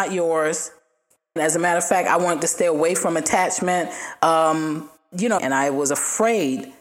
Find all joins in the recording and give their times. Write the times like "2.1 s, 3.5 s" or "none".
1.4 s, 5.4 s